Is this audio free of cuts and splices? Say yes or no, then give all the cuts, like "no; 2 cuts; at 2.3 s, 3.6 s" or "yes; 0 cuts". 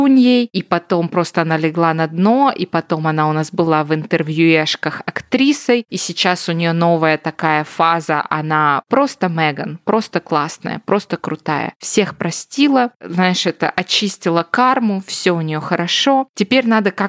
yes; 0 cuts